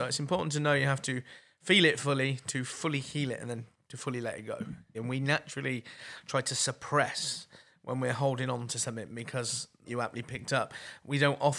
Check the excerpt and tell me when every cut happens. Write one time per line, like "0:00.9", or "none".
0:04.9
0:09.9